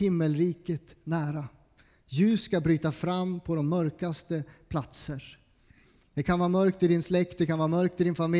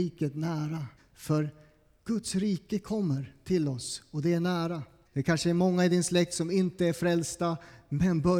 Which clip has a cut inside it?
second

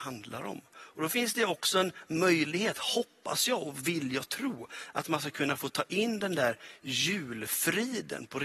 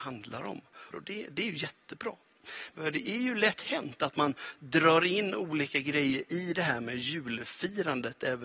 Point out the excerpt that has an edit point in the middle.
second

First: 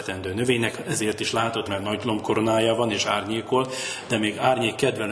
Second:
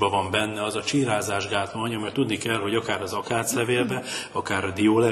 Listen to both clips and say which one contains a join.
first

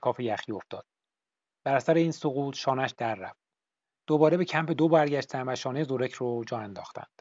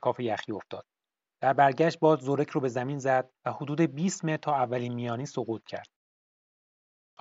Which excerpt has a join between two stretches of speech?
second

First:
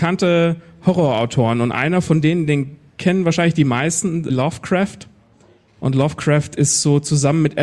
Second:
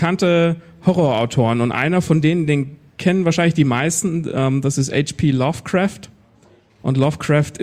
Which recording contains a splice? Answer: first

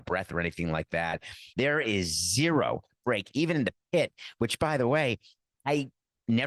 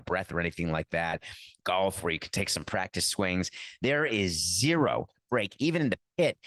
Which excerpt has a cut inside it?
first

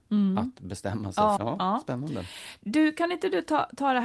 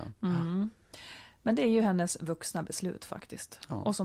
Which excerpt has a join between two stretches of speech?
first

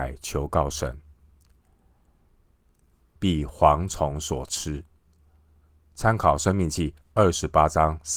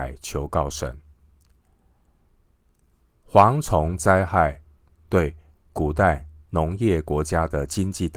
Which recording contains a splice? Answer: first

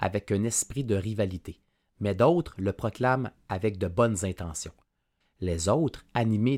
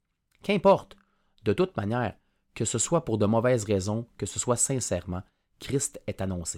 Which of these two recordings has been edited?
first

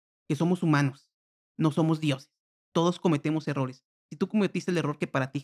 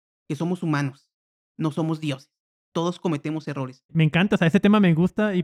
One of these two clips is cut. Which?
second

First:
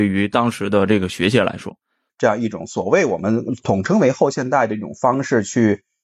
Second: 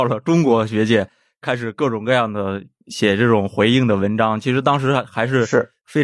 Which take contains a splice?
first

